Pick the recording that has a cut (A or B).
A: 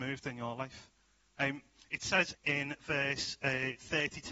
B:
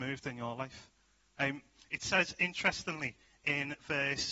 A